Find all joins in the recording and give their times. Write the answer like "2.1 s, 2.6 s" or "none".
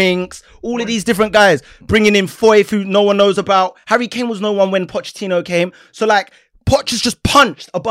none

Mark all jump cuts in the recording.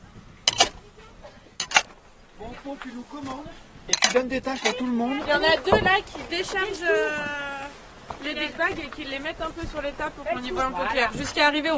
5.2 s

